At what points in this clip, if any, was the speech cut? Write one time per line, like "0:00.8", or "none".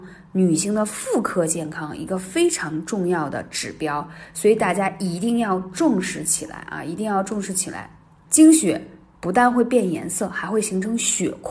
none

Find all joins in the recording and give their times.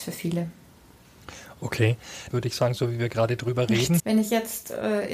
0:02.3
0:04.0

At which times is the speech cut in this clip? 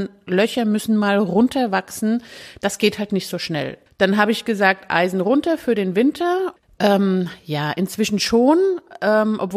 0:03.9
0:06.6

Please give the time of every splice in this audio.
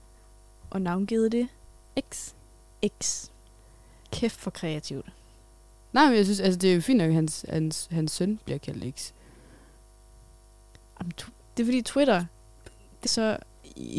0:11.4
0:13.0

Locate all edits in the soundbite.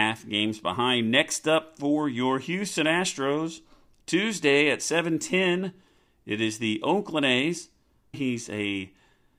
0:08.1

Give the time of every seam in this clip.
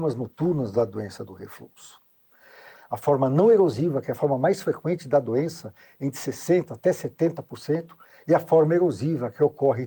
0:02.7

